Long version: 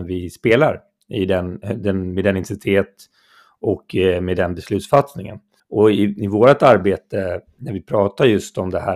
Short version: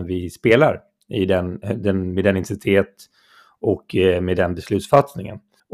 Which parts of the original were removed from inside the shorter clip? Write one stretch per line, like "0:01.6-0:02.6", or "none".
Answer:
none